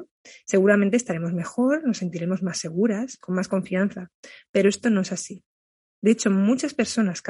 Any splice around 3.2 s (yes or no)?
yes